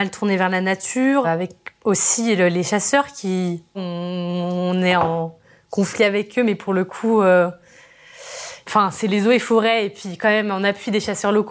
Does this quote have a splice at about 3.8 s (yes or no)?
yes